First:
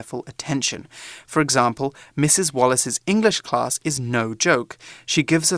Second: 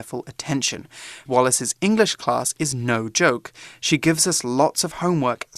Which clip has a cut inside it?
second; 1 cut; at 1.3 s

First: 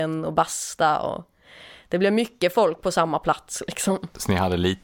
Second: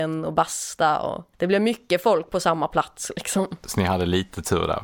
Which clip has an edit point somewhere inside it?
second; 1 cut; at 1.3 s

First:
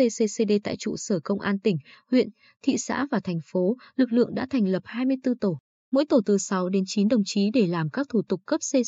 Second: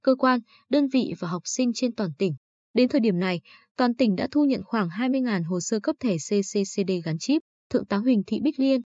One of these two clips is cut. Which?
second; 1 cut; at 2.6 s

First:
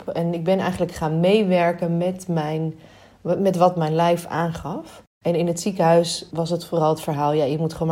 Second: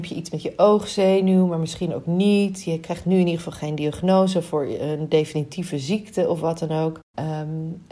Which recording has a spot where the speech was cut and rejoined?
first; 1 cut; at 6.3 s

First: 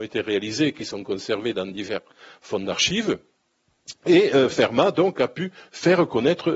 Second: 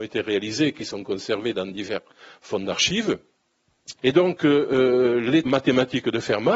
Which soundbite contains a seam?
second; 2 cuts; at 4.0 s, 5.5 s

